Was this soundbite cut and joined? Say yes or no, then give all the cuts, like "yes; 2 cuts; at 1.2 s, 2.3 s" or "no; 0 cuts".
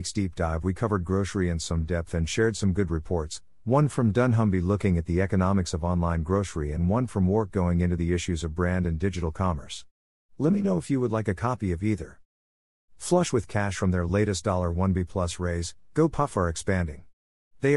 no; 0 cuts